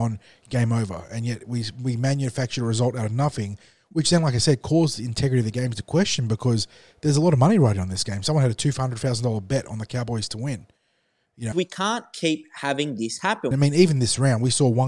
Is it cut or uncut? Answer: cut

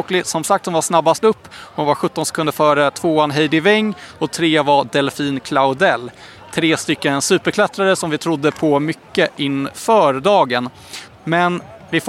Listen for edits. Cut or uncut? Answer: cut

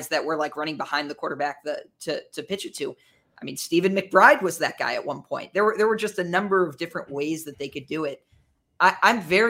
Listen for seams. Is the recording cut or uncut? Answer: uncut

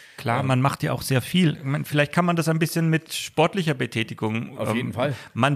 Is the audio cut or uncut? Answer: uncut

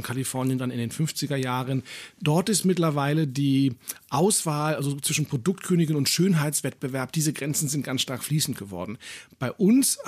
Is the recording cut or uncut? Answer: uncut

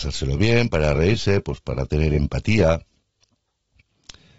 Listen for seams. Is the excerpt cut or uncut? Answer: uncut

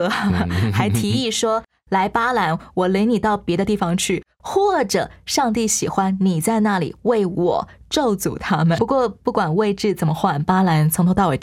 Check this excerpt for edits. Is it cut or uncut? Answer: cut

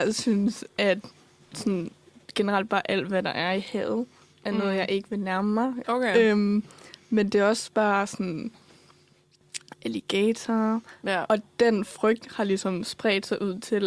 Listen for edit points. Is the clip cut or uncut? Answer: cut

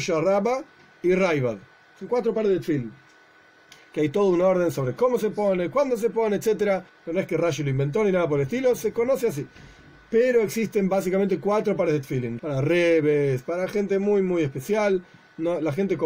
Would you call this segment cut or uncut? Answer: cut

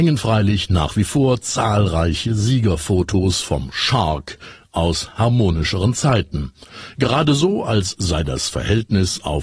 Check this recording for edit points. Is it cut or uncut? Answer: uncut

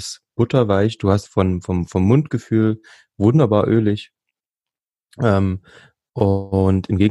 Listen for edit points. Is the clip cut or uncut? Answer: cut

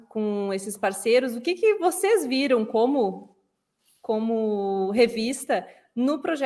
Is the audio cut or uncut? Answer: uncut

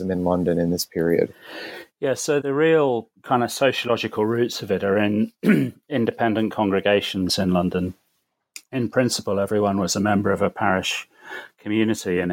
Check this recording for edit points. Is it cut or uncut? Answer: cut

